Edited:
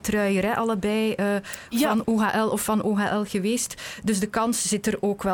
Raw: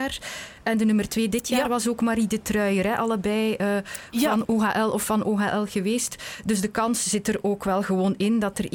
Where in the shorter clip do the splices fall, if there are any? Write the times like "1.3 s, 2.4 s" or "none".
none